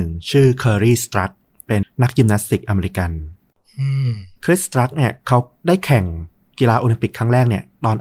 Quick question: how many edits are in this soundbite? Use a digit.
1